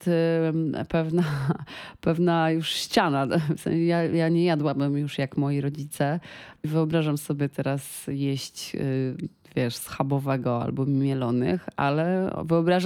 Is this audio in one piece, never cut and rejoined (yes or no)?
yes